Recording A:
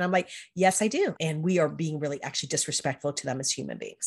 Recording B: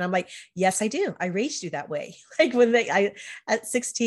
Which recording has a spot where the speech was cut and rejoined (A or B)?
A